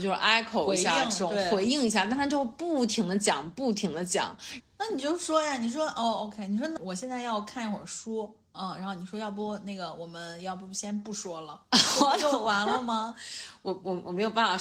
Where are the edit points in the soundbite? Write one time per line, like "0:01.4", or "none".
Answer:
0:04.6
0:06.8